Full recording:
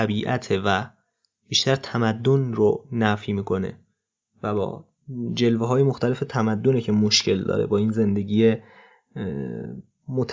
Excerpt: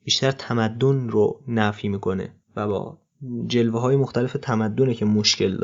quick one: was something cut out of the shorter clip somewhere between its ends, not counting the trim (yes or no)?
yes